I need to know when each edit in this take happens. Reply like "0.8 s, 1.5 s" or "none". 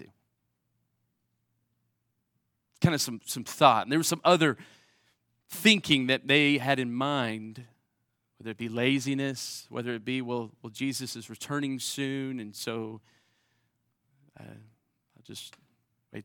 none

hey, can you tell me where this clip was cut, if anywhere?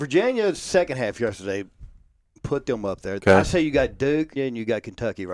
3.2 s, 4.4 s

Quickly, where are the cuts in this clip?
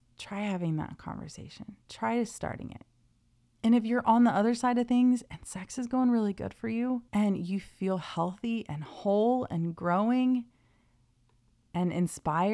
3.6 s, 7.1 s

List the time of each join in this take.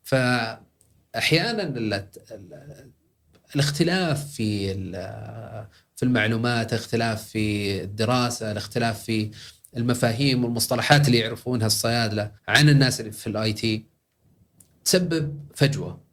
12.4 s

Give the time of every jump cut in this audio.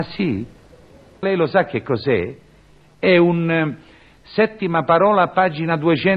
1.2 s

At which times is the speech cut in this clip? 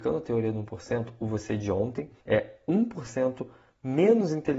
2.2 s

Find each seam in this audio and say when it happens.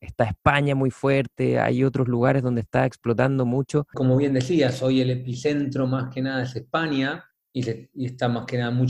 3.9 s

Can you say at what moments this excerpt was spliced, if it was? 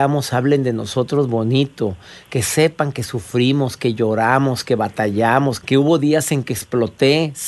5.6 s

